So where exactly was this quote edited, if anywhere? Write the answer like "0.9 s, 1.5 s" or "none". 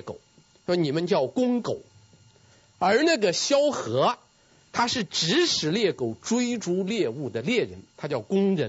none